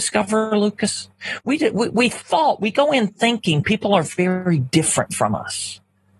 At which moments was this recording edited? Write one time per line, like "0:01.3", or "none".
none